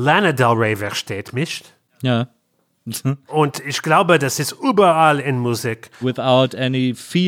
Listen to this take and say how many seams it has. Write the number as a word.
two